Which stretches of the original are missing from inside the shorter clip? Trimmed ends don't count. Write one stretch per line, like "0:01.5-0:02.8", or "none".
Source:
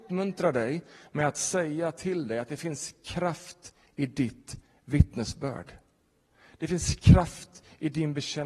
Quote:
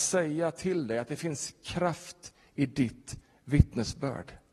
none